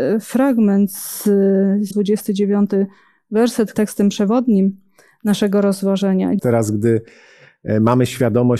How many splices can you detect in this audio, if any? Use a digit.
3